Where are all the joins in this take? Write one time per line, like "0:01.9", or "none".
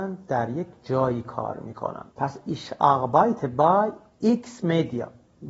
0:02.1